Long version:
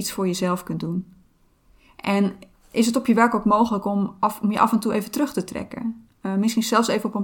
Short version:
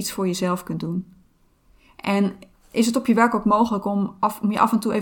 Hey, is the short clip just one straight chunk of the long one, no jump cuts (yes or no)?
yes